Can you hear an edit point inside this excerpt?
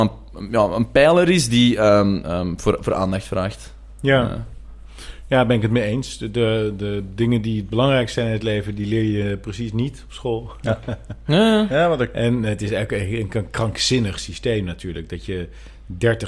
no; 0 cuts

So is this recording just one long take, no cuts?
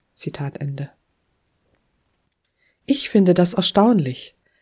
yes; 0 cuts

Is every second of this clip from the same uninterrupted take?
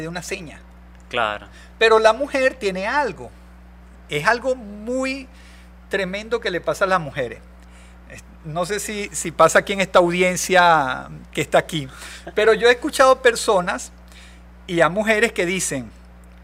yes; 0 cuts

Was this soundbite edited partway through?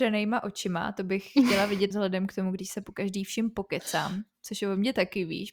yes; 1 cut; at 1.9 s

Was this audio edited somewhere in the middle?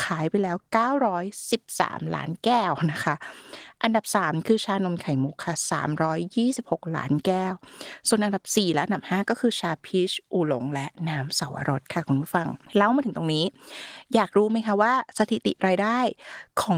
yes; 1 cut; at 12.7 s

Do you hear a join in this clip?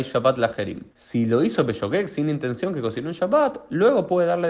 yes; 1 cut; at 0.9 s

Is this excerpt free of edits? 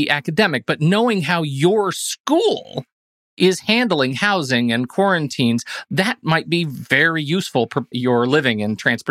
no; 1 cut; at 7.9 s

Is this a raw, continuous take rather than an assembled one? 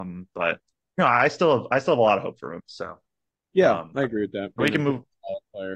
no; 2 cuts; at 2.6 s, 4.6 s

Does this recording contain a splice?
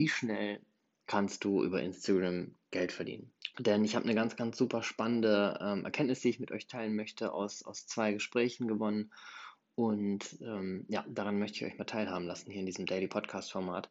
yes; 1 cut; at 3.5 s

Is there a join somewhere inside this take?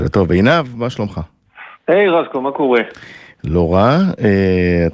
no; 0 cuts

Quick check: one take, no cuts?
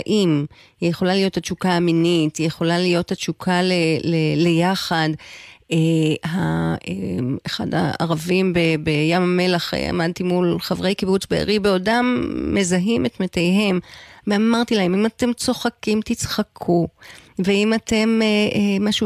yes; 0 cuts

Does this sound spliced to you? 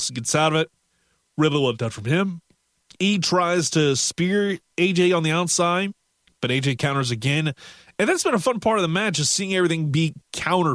no; 0 cuts

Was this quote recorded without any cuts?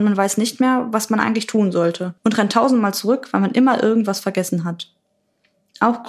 no; 1 cut; at 2.2 s

